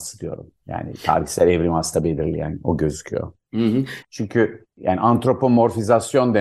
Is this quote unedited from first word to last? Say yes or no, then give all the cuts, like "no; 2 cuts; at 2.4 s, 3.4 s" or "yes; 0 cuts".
no; 1 cut; at 4.0 s